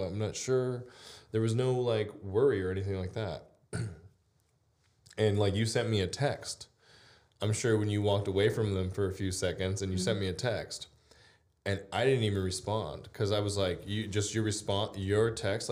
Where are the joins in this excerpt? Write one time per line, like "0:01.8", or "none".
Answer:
none